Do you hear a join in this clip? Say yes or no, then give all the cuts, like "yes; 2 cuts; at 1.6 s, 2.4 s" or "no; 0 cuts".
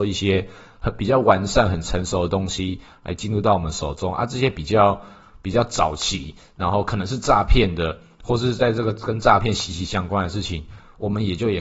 no; 0 cuts